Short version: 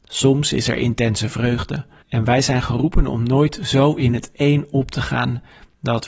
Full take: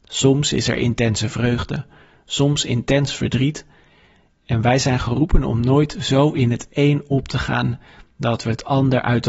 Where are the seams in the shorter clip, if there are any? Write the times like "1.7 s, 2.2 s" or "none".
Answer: 2.0 s